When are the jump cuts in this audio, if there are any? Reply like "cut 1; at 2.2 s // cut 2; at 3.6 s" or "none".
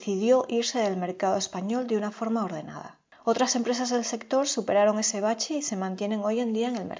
none